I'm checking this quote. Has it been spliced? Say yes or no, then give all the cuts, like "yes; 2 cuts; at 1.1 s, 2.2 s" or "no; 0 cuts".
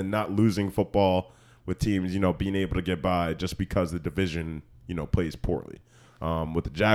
no; 0 cuts